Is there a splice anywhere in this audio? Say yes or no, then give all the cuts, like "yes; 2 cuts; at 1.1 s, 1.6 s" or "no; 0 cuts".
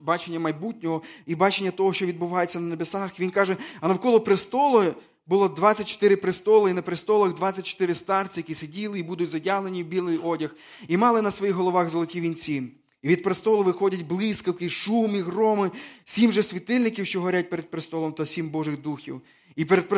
no; 0 cuts